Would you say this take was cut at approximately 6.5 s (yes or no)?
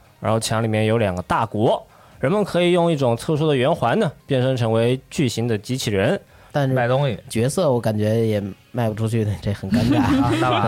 yes